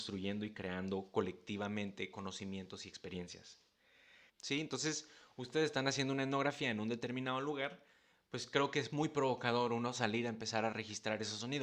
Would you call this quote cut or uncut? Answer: cut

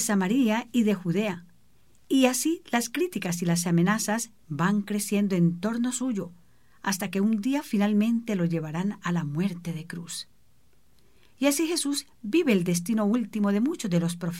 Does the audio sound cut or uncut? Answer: uncut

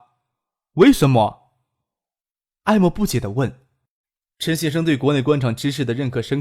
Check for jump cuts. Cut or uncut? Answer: uncut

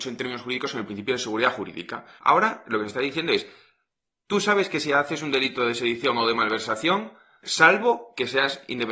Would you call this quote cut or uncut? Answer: cut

